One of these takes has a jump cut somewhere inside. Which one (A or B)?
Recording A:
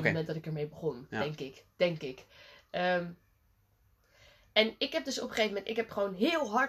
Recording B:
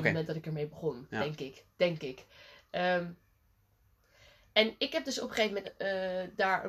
B